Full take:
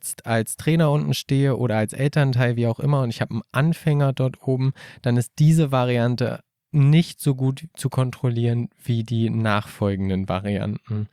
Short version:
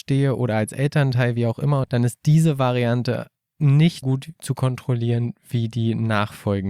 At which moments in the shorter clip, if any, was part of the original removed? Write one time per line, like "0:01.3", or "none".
0:01.8
0:04.0